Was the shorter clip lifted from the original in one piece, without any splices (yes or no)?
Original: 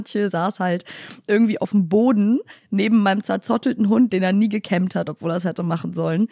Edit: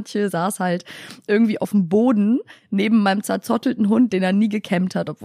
yes